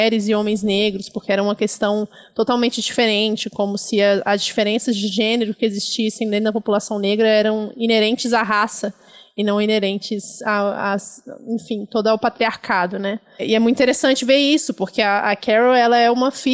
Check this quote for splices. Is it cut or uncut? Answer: uncut